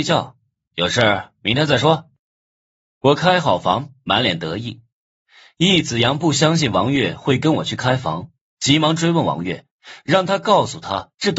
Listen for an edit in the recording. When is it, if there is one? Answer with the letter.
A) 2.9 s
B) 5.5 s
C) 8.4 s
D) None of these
D